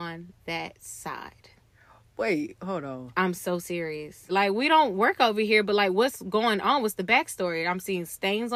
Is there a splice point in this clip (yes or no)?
yes